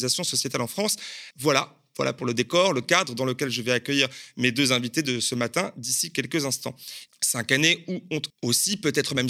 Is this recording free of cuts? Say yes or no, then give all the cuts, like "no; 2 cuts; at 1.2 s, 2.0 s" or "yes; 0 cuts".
no; 3 cuts; at 1.3 s, 7.1 s, 8.3 s